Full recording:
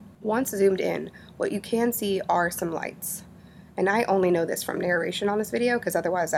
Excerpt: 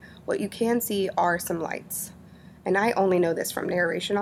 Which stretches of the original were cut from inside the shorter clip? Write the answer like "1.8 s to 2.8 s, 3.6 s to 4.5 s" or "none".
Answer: none